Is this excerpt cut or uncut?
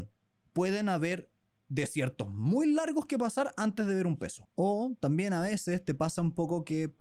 cut